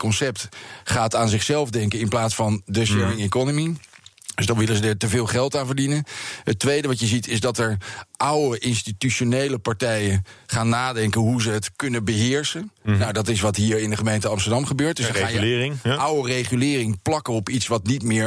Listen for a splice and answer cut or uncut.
uncut